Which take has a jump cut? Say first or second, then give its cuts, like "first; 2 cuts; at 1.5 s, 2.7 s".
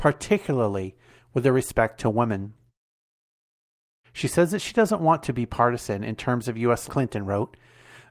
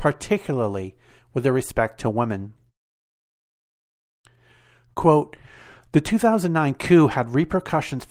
first; 2 cuts; at 4.0 s, 6.9 s